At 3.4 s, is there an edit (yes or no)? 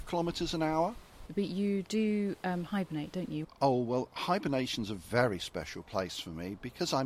yes